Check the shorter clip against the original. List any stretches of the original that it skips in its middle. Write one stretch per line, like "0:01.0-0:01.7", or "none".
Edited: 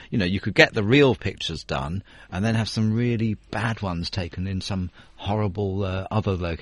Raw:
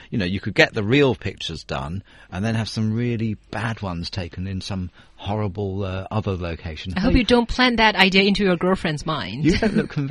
none

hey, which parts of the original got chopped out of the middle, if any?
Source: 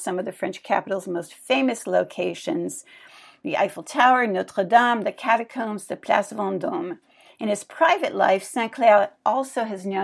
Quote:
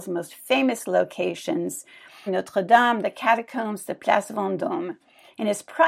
0:03.3-0:04.3

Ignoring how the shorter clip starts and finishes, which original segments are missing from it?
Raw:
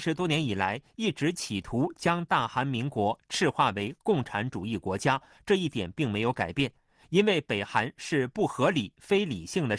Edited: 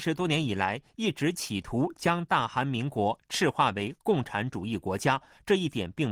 none

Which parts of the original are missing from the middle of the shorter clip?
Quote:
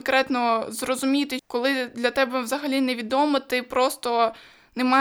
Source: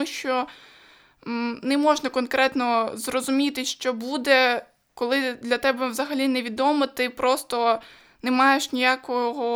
0:03.6-0:04.9

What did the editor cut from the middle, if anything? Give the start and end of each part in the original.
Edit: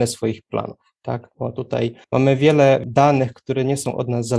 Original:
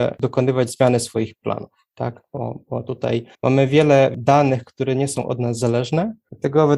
0:02.3-0:02.7

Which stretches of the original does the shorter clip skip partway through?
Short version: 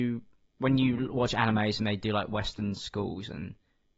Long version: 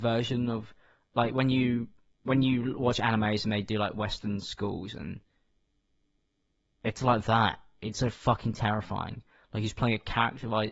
none

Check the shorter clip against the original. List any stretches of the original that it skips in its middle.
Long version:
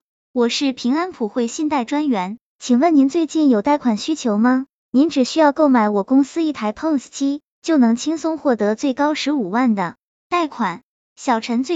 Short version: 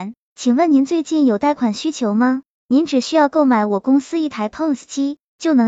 none

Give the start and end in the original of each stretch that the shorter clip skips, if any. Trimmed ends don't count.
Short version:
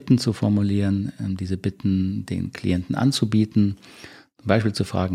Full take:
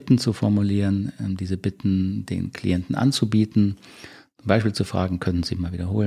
none

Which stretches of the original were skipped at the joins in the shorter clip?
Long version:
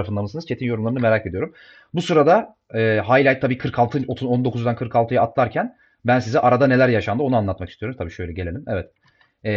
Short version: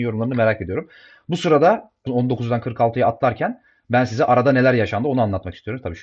0:02.7-0:04.2

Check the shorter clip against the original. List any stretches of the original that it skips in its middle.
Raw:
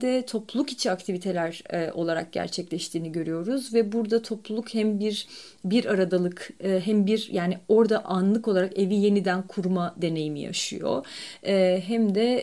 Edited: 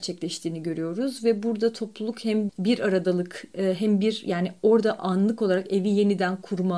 0:05.0-0:05.5

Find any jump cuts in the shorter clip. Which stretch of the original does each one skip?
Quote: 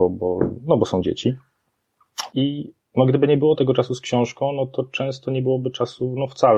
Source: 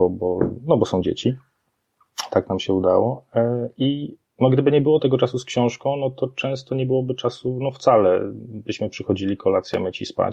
0:02.3-0:03.7

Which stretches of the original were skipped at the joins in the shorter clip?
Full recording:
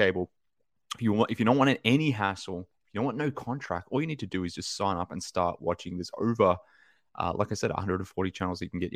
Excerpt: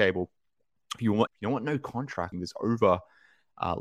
0:01.3-0:02.8
0:03.8-0:05.9

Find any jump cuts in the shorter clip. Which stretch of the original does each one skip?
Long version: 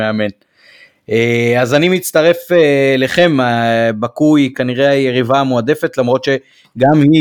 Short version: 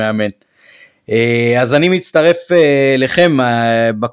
none

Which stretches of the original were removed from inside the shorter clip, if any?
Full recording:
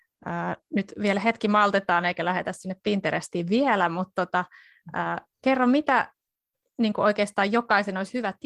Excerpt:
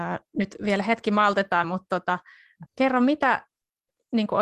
0:02.0-0:03.9
0:04.9-0:05.3

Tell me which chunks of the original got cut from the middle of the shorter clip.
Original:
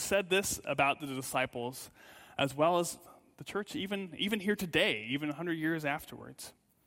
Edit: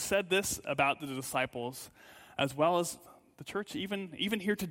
none

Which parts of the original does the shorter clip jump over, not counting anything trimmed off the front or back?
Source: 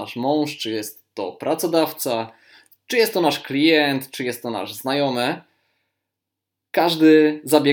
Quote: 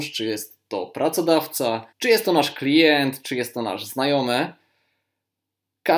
0:02.4-0:02.8

